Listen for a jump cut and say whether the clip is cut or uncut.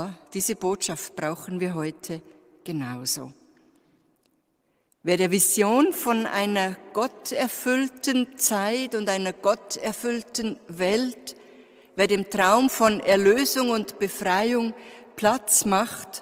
uncut